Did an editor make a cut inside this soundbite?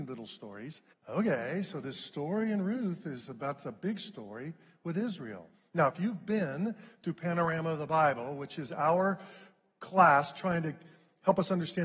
yes; 1 cut; at 0.9 s

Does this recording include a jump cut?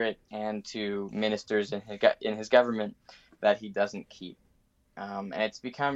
no; 0 cuts

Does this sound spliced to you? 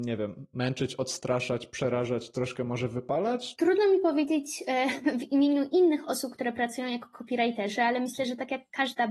yes; 1 cut; at 3.5 s

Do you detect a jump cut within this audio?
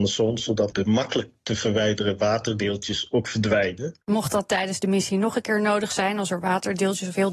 no; 0 cuts

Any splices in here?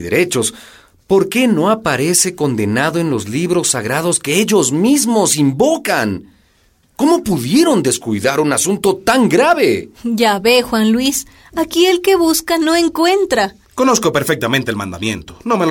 yes; 1 cut; at 13.6 s

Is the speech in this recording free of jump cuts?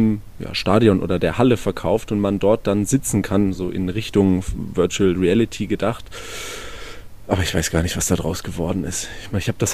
yes; 0 cuts

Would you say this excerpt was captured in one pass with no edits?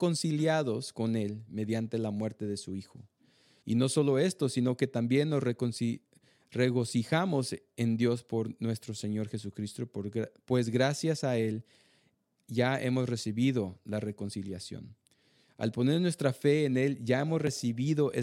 no; 1 cut; at 3.6 s

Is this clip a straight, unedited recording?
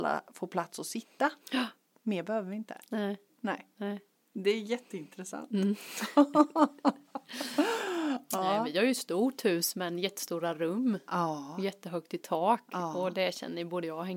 yes; 0 cuts

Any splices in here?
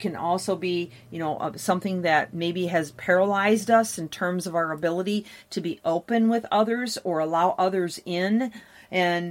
no; 0 cuts

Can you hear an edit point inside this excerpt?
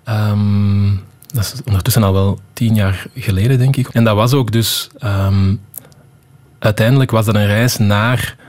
yes; 1 cut; at 3.9 s

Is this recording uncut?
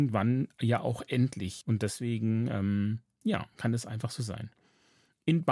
no; 1 cut; at 1.6 s

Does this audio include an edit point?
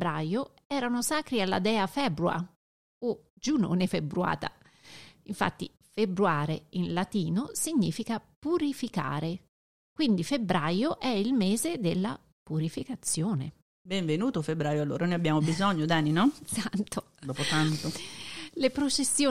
no; 0 cuts

